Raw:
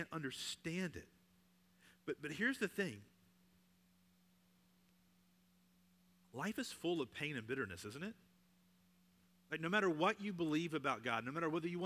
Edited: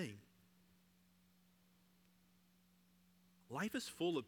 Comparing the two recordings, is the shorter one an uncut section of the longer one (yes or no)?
yes